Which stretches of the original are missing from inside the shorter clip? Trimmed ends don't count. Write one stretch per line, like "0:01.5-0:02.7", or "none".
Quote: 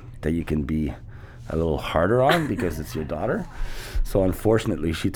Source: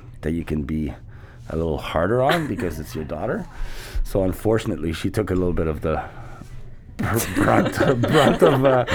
none